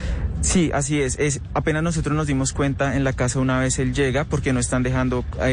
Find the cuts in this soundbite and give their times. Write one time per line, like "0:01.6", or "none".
none